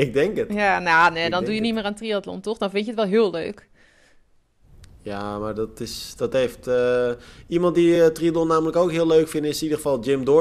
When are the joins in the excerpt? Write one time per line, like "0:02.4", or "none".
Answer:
none